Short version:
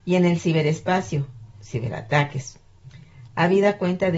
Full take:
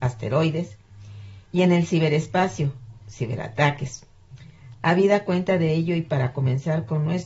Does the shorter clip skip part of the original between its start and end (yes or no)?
no